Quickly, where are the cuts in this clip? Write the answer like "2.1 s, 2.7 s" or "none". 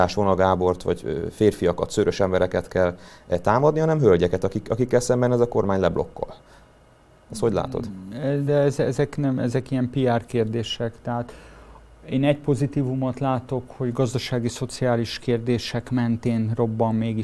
none